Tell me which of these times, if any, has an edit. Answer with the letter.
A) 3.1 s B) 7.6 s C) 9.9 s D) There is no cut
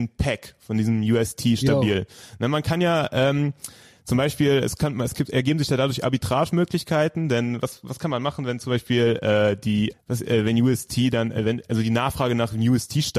C